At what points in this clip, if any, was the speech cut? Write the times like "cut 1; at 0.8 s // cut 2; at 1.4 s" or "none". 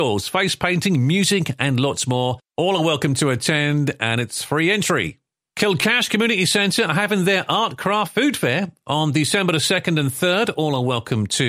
none